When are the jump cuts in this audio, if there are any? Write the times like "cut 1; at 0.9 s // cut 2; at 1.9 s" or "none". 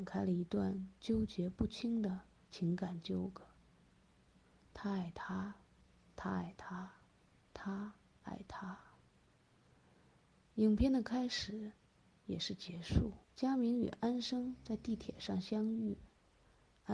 cut 1; at 13.2 s